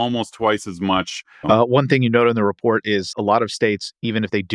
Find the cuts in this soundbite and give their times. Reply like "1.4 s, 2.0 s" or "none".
1.4 s, 3.1 s